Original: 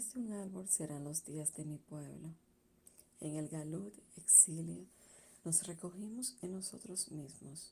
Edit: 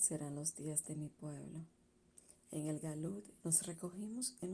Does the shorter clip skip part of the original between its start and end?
yes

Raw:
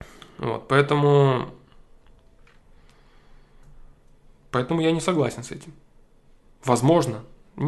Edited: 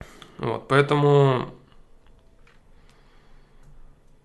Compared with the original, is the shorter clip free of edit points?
yes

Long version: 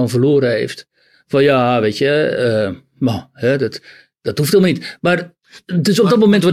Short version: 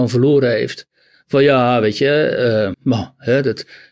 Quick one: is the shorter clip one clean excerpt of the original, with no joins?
no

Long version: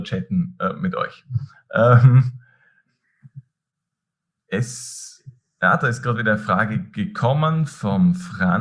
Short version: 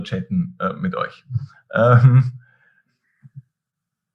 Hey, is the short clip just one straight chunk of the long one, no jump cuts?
yes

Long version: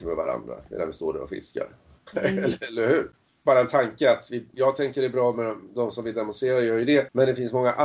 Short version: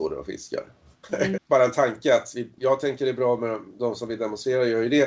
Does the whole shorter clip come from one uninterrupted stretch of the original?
no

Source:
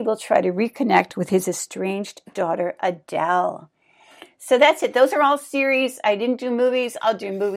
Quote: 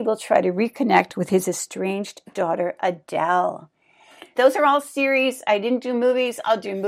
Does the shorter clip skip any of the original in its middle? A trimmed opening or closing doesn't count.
yes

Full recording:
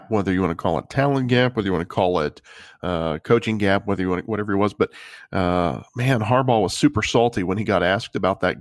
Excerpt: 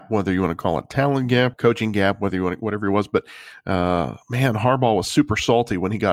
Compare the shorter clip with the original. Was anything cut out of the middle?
yes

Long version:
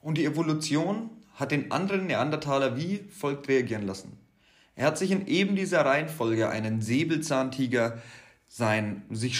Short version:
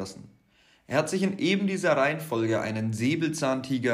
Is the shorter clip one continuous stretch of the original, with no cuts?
yes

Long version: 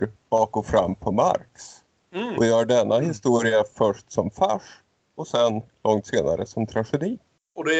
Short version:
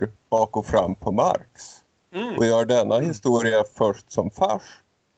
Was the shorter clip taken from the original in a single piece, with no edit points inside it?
yes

